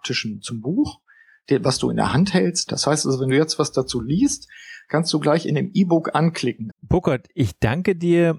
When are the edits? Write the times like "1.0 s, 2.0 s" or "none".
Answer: 2.7 s, 6.7 s